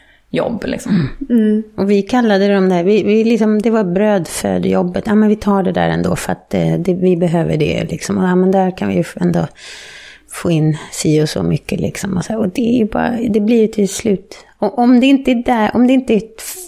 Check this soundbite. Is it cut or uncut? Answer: uncut